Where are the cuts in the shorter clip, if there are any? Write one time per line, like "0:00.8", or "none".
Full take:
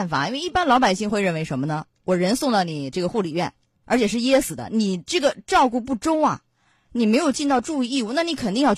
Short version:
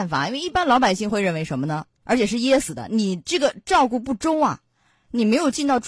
0:02.0